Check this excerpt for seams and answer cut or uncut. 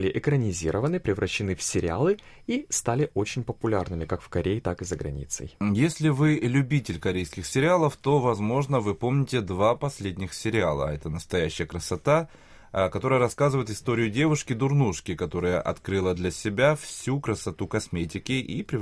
uncut